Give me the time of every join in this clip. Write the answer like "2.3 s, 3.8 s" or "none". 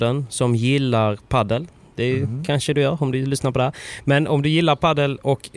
none